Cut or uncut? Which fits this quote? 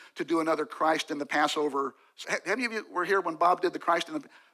cut